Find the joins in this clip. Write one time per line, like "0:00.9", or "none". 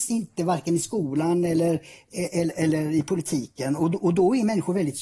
none